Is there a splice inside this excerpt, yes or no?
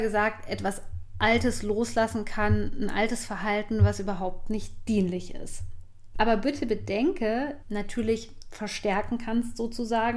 yes